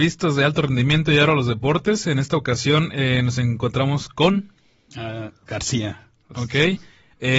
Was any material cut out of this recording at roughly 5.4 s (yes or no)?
yes